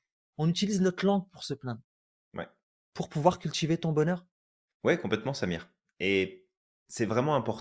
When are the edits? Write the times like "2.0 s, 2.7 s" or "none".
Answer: 2.2 s